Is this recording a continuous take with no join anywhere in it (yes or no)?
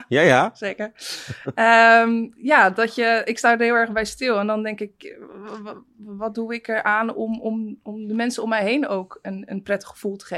yes